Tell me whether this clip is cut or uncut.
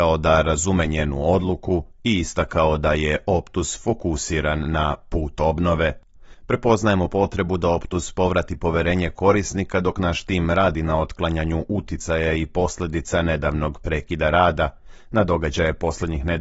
uncut